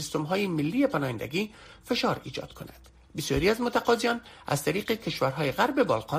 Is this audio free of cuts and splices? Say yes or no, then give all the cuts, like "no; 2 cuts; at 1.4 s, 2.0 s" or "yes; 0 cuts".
yes; 0 cuts